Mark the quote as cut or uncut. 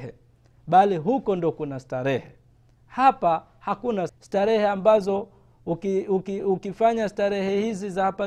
cut